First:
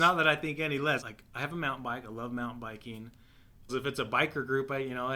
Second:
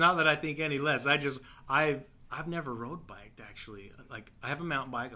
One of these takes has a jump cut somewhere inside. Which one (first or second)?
first